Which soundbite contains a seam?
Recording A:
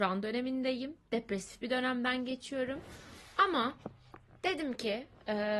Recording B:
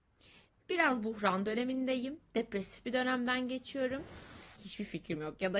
B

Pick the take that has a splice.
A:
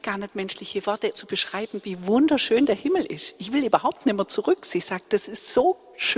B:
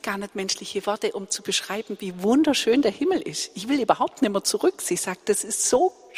A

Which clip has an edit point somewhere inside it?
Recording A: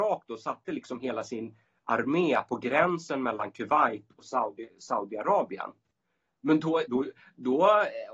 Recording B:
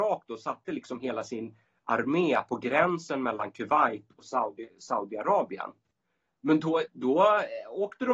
B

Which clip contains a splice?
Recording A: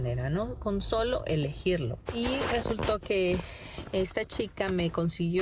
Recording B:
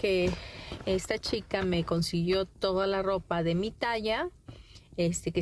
A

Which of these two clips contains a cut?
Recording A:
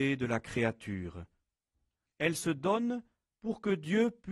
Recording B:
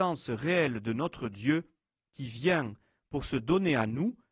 A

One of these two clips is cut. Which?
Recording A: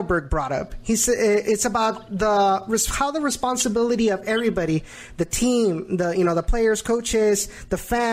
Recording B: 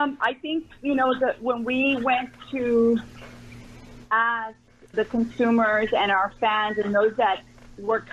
B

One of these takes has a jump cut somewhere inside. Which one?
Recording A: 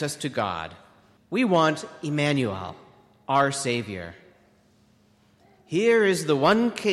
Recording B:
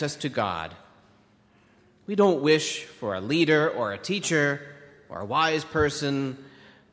A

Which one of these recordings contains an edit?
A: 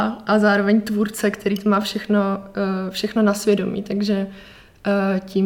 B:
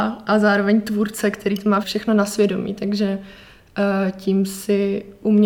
B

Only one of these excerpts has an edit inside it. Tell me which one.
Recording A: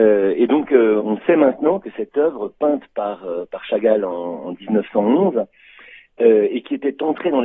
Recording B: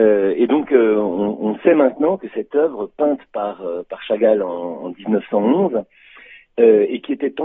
A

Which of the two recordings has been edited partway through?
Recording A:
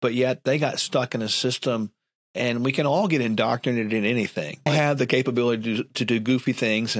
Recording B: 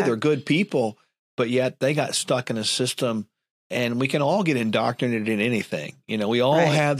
A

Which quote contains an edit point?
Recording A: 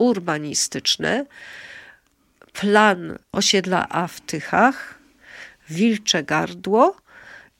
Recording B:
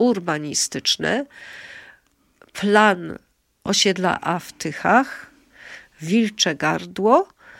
A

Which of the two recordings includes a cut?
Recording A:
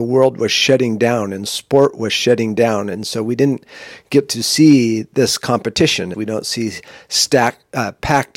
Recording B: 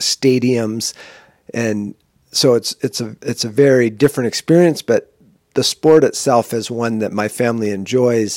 A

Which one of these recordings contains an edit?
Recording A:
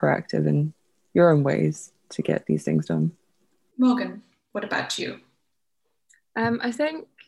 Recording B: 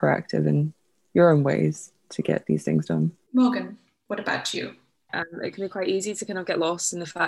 B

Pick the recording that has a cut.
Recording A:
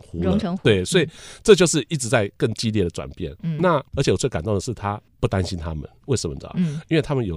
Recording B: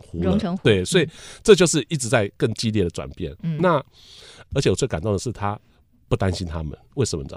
A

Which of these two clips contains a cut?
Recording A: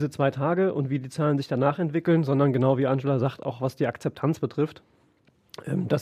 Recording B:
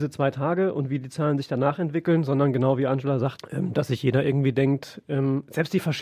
B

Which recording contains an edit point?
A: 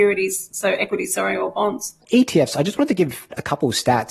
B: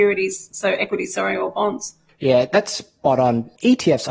A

